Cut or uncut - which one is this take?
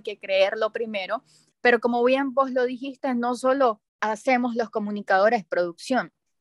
cut